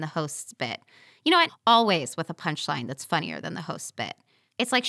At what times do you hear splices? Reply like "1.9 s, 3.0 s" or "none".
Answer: 1.5 s